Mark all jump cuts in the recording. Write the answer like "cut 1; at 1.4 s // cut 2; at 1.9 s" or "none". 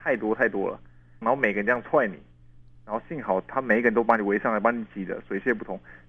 cut 1; at 1.2 s